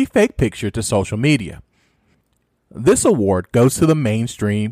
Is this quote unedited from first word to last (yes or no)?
no